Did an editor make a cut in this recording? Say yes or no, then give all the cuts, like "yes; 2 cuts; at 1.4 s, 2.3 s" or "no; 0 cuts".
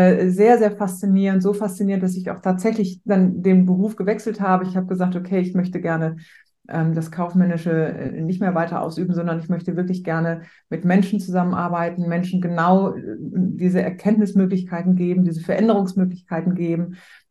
no; 0 cuts